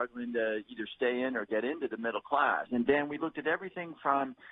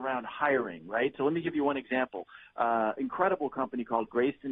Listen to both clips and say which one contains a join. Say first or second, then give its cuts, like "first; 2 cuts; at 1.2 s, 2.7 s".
first; 1 cut; at 2.7 s